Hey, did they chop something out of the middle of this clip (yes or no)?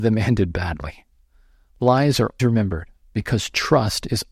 yes